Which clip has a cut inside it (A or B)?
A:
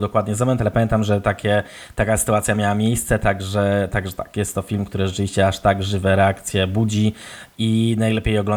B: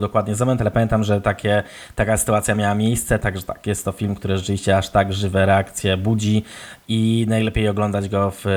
B